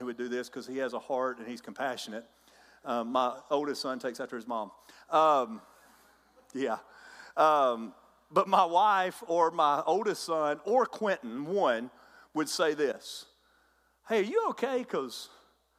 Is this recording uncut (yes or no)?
yes